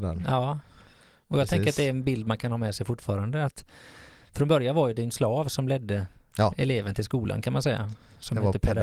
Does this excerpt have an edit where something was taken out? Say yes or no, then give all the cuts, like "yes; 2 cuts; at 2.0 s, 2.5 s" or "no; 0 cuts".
no; 0 cuts